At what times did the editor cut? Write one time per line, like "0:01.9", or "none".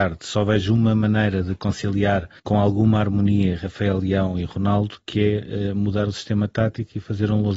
0:02.4